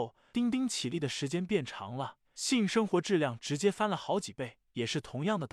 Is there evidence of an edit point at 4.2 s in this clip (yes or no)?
no